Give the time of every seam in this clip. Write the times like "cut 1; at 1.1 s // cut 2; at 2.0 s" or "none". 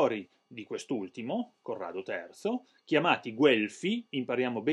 none

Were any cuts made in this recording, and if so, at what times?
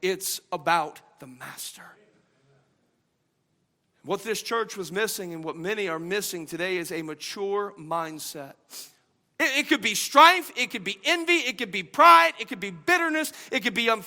cut 1; at 9.2 s

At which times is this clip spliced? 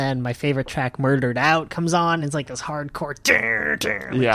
none

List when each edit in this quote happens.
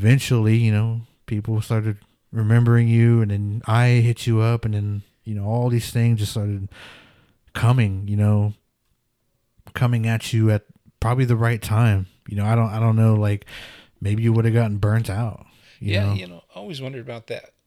none

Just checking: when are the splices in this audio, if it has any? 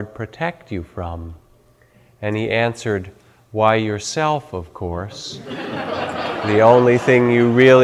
none

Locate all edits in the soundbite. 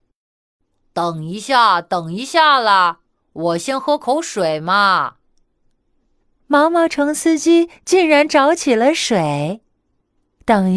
none

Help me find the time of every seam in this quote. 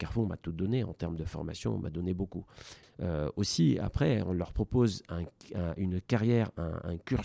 cut 1; at 2.8 s

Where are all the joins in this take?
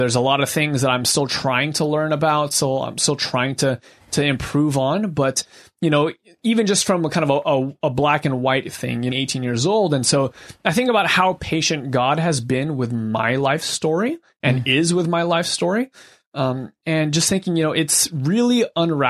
cut 1; at 9.1 s

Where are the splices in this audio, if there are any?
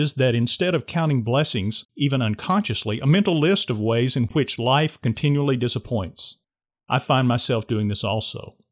cut 1; at 1.9 s

